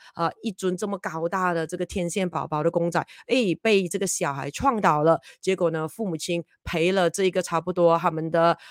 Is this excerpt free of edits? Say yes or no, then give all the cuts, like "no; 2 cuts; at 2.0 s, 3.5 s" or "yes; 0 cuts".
yes; 0 cuts